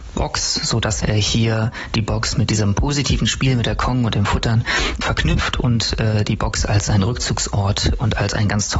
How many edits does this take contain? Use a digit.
2